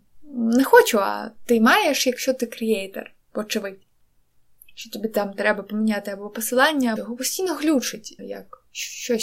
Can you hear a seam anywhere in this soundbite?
yes; 2 cuts; at 7.0 s, 8.2 s

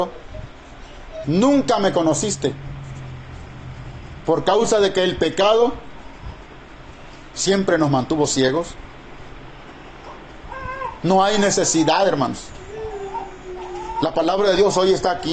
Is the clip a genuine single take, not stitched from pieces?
no; 2 cuts; at 1.2 s, 4.2 s

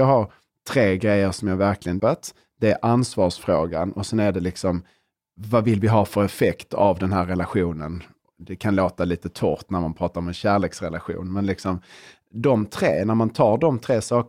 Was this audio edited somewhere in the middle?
yes; 1 cut; at 2.0 s

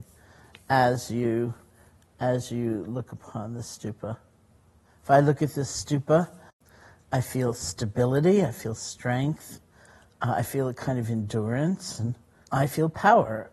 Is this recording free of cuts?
yes; 0 cuts

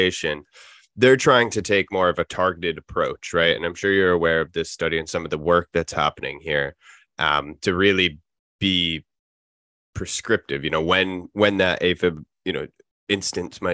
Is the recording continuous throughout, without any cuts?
yes; 0 cuts

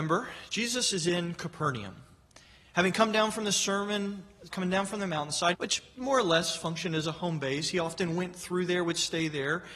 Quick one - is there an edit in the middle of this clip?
yes; 2 cuts; at 4.5 s, 5.5 s

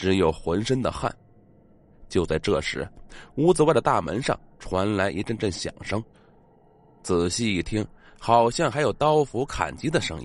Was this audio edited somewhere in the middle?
no; 0 cuts

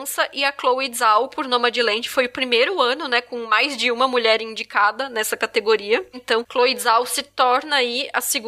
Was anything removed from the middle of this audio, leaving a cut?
yes; 1 cut; at 6.1 s

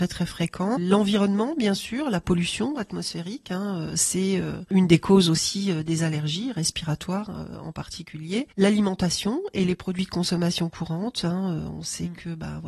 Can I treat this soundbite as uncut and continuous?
yes; 0 cuts

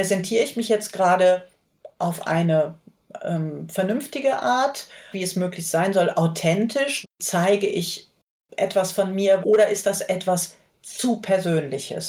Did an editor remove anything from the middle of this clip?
yes; 3 cuts; at 5.1 s, 7.0 s, 9.4 s

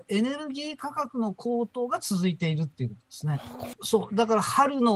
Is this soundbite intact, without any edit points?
no; 1 cut; at 3.7 s

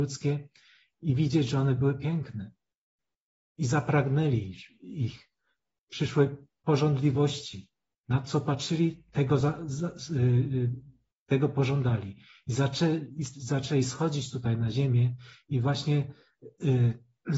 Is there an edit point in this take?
no; 0 cuts

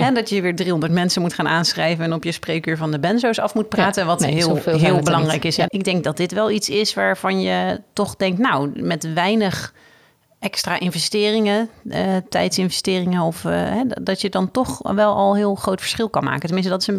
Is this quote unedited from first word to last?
no; 1 cut; at 5.7 s

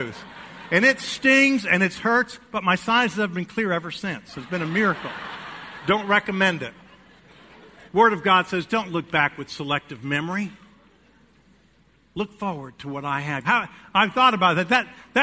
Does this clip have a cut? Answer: yes; 2 cuts; at 7.9 s, 13.4 s

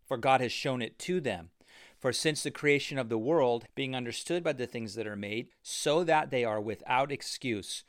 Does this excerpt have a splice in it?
yes; 2 cuts; at 3.7 s, 5.5 s

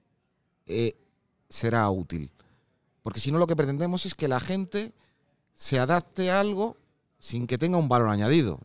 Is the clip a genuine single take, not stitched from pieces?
yes; 0 cuts

